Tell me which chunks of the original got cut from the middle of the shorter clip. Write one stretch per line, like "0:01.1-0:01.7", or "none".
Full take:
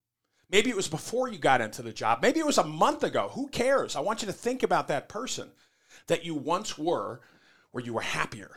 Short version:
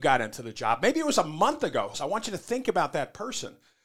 0:03.3-0:03.9